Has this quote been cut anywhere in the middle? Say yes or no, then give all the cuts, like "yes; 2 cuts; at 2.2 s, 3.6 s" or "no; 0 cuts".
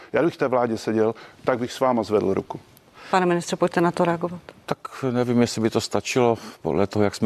no; 0 cuts